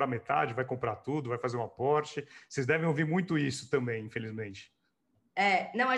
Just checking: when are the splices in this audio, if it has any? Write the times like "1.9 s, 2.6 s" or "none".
none